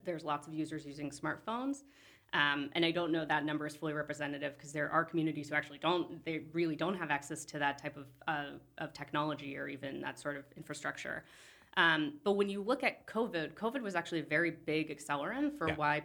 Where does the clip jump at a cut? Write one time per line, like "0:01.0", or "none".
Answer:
0:03.3